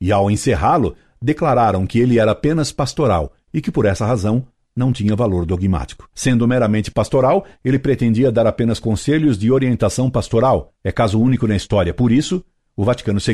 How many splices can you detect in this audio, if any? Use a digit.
0